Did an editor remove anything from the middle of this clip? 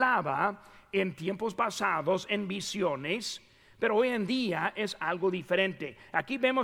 yes; 1 cut; at 2.3 s

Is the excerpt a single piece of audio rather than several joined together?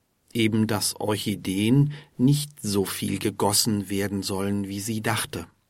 yes; 0 cuts

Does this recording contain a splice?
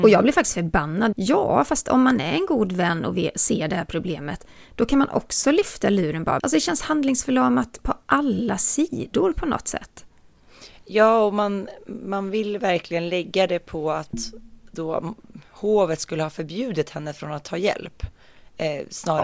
yes; 2 cuts; at 1.1 s, 6.4 s

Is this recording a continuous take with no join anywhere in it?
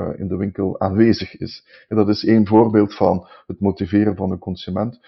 yes; 0 cuts

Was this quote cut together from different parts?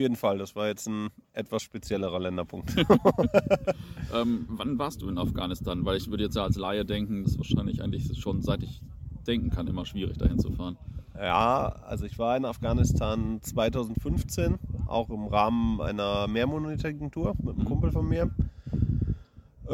yes; 1 cut; at 7.2 s

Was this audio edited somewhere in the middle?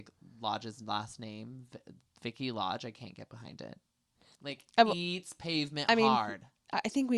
yes; 1 cut; at 4.3 s

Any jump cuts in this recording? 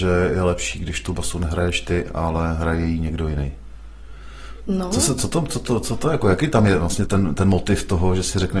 yes; 1 cut; at 7.1 s

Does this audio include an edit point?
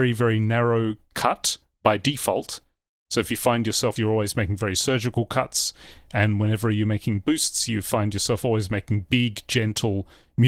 yes; 1 cut; at 4.0 s

